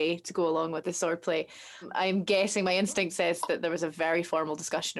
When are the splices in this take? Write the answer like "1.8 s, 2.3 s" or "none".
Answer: none